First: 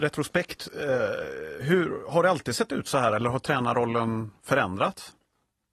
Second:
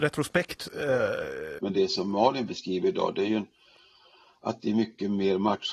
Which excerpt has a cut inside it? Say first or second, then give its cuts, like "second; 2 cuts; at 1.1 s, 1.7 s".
second; 1 cut; at 1.6 s